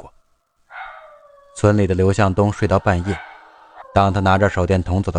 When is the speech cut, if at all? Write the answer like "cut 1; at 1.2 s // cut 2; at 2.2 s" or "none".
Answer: cut 1; at 3.8 s